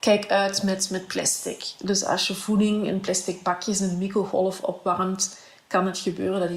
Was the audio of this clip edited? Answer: no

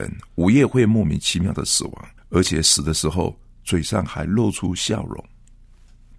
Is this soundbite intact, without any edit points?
no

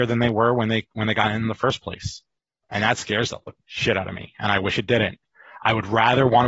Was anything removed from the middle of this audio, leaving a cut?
no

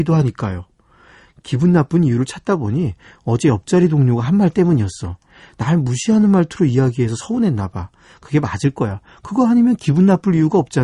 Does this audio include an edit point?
no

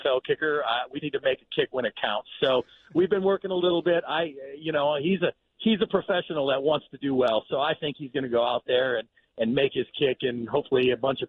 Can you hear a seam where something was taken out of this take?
yes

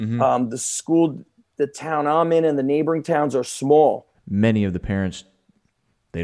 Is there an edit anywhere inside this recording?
yes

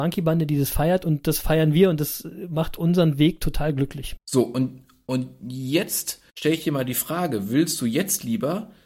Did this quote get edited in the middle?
yes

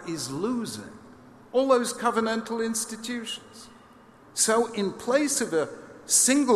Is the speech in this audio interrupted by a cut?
yes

